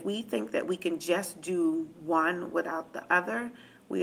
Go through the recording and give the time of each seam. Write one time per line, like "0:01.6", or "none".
none